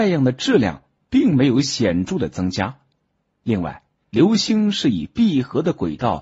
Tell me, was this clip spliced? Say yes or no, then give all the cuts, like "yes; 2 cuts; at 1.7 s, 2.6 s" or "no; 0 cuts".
yes; 1 cut; at 4.0 s